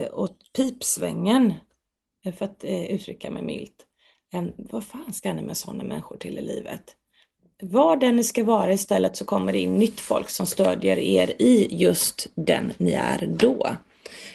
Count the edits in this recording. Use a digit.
0